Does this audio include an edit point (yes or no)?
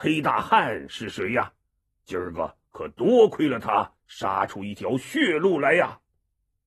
no